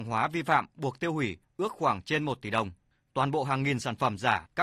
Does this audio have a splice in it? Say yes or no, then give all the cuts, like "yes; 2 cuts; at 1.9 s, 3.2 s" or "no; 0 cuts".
no; 0 cuts